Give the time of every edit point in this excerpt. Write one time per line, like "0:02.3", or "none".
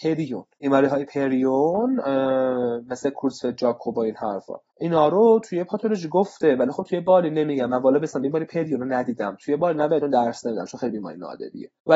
none